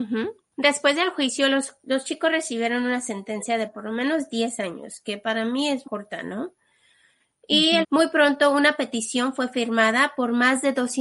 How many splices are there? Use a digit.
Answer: 2